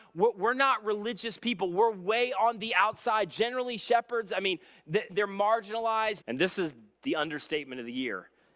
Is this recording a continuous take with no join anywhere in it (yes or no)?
no